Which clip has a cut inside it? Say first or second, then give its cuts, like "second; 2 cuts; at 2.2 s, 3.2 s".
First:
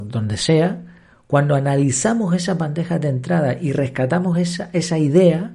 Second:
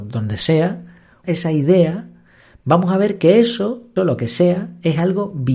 second; 2 cuts; at 1.2 s, 4.0 s